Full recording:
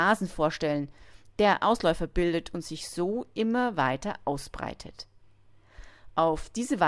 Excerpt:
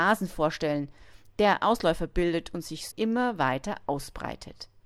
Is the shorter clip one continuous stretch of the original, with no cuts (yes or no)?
no